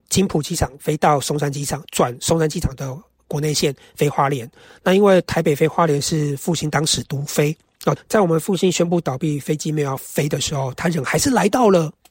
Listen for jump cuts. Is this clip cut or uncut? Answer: cut